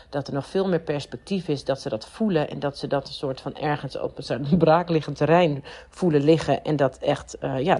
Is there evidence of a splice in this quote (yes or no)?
no